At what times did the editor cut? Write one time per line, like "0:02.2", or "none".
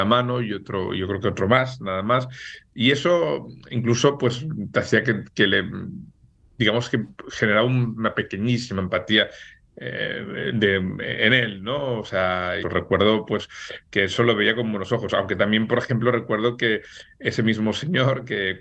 0:12.6